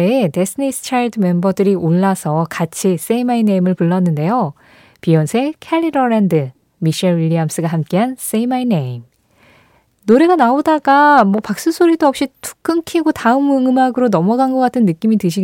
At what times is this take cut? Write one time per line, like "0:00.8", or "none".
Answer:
none

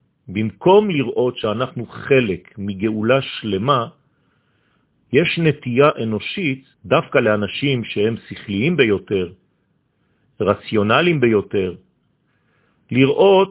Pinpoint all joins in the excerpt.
0:06.7

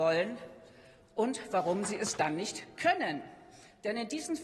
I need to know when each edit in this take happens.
none

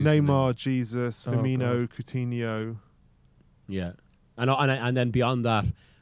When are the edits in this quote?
none

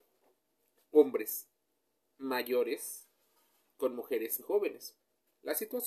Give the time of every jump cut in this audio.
0:04.4

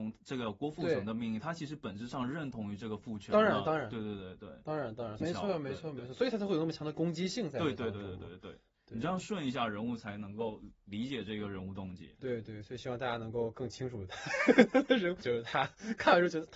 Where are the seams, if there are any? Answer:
0:05.2
0:15.2

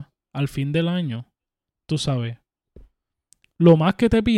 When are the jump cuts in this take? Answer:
0:01.7
0:03.4

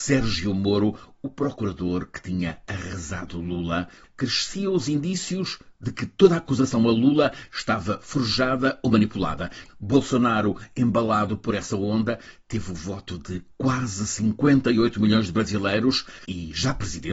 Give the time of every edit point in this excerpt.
0:09.7

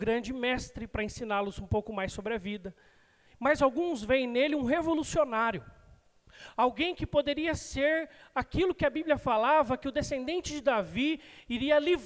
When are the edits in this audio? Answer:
none

